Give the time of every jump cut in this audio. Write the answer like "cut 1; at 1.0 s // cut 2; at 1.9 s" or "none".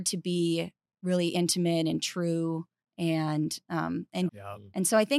cut 1; at 4.3 s